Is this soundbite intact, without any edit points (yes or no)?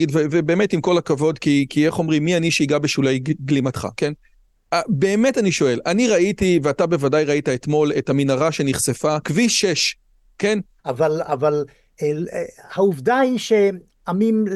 no